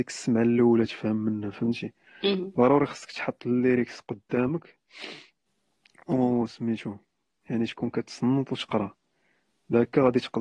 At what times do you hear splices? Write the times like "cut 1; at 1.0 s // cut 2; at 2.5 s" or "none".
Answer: none

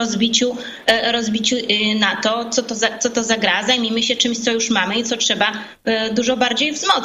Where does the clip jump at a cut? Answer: none

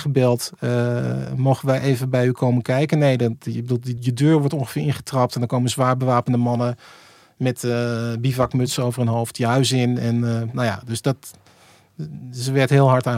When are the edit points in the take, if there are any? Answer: cut 1; at 4.0 s

